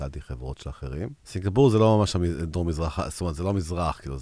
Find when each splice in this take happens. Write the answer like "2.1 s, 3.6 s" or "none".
1.2 s

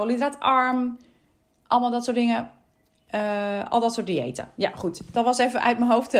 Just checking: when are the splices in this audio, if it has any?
none

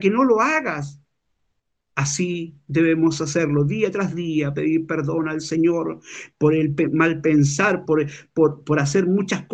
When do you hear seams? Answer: 1.8 s, 7.9 s

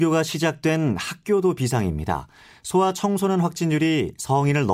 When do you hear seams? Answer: none

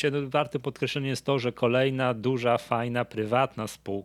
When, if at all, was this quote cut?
none

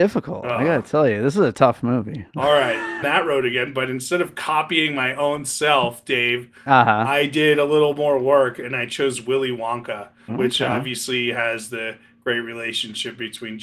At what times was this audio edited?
3.0 s, 10.3 s

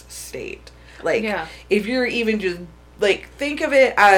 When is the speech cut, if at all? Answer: 1.0 s

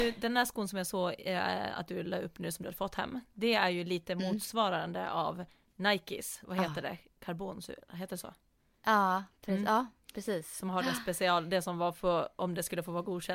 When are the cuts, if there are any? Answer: 6.4 s

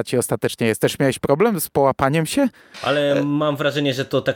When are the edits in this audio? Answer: 2.7 s

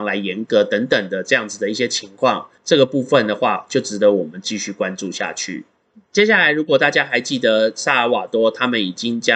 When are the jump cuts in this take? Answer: 2.6 s

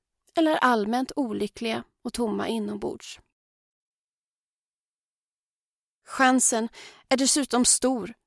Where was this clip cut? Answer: none

